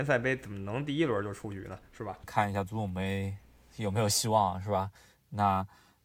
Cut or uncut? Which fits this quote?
uncut